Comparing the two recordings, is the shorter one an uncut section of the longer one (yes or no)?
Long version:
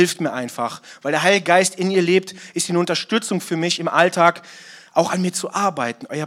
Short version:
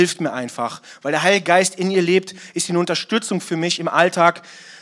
yes